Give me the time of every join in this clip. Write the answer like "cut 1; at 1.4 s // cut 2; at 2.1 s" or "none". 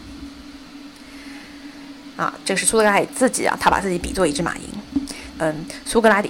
cut 1; at 2.1 s // cut 2; at 5.3 s